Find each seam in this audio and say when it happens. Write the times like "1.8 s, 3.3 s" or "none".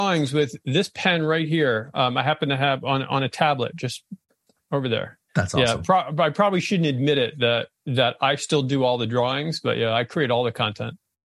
5.3 s